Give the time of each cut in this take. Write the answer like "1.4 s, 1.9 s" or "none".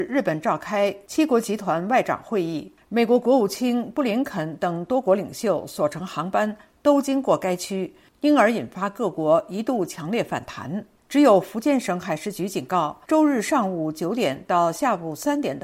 11.0 s, 13.0 s